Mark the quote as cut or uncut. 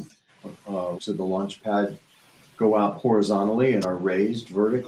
cut